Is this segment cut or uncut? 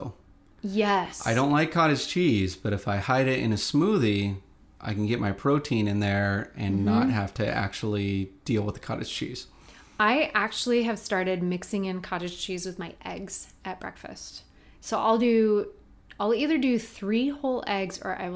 uncut